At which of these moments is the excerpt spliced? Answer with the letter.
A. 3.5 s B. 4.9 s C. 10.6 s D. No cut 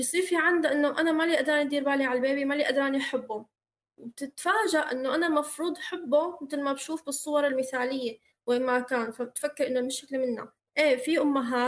C